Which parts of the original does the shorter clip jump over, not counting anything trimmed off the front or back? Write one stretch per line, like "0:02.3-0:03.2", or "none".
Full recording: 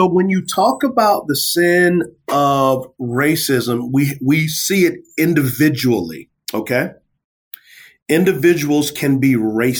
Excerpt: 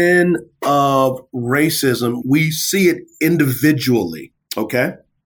0:03.9-0:04.2